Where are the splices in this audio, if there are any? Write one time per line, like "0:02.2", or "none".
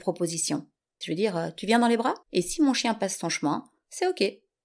0:01.0
0:02.2